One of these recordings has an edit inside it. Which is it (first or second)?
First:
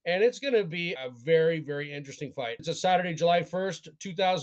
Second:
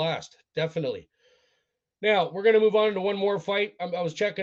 first